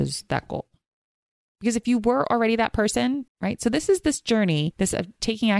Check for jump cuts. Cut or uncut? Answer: cut